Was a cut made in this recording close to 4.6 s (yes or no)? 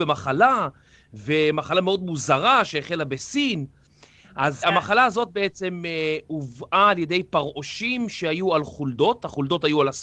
yes